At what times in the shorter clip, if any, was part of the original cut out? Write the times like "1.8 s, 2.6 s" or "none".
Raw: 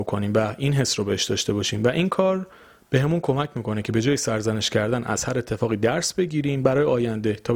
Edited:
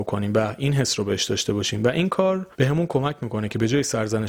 2.5 s